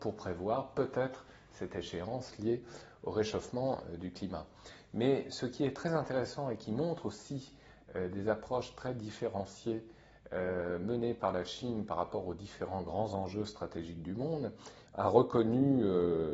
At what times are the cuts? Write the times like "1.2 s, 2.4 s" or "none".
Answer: 14.9 s